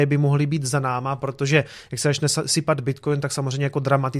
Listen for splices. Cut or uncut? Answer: uncut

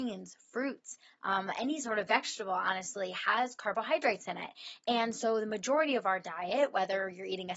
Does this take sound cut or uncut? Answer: uncut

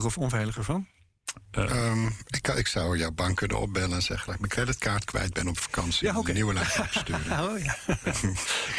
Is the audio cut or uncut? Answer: uncut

